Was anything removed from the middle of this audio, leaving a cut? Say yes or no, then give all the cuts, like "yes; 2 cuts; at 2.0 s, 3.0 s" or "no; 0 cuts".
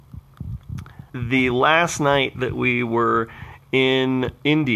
yes; 1 cut; at 1.1 s